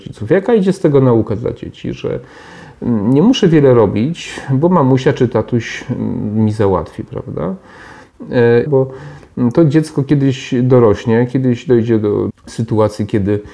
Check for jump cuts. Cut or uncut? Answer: cut